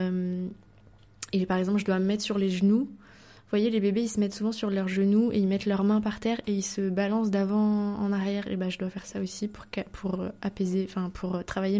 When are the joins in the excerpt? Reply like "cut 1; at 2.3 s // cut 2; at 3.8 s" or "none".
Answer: none

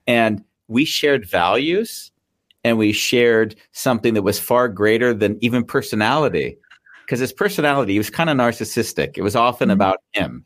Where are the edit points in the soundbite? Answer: none

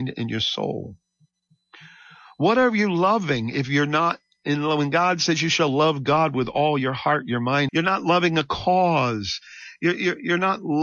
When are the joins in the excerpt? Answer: cut 1; at 7.7 s

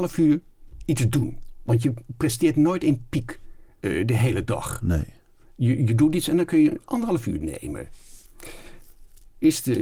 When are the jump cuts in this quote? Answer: none

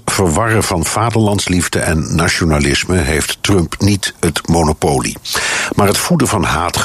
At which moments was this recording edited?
none

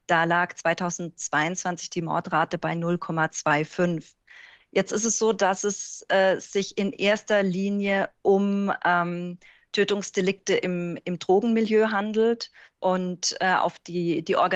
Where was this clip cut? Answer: none

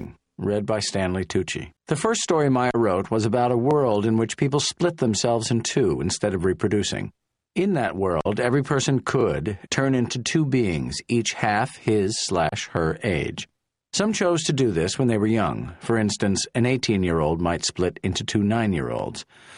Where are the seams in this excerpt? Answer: cut 1; at 1.8 s // cut 2; at 9.7 s

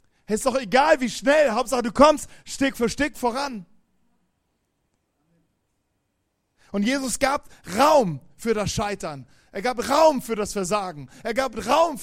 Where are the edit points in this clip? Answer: none

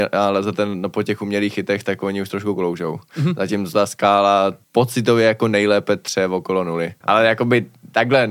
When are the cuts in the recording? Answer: cut 1; at 4.6 s // cut 2; at 7.0 s

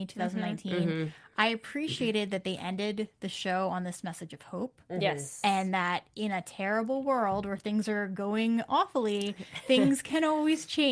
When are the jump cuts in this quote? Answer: none

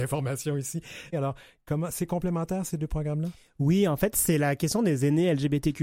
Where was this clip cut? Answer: cut 1; at 1.1 s

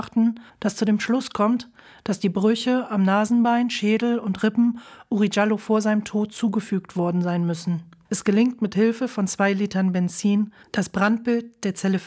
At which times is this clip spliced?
cut 1; at 8.0 s

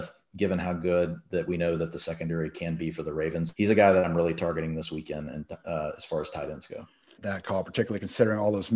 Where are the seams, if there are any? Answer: cut 1; at 3.5 s // cut 2; at 7.2 s

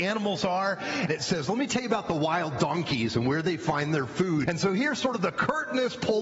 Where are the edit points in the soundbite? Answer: cut 1; at 1.1 s // cut 2; at 4.5 s

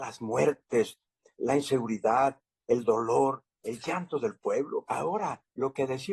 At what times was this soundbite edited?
cut 1; at 4.9 s

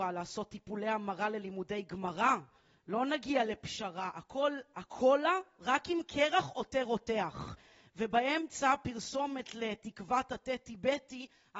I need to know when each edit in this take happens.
none

